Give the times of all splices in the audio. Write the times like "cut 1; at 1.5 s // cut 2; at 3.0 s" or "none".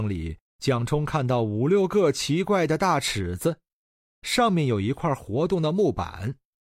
cut 1; at 4.0 s